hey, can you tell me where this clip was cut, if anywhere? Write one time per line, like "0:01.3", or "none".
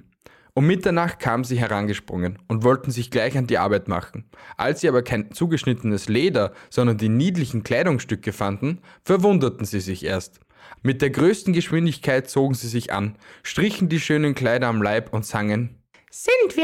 0:10.8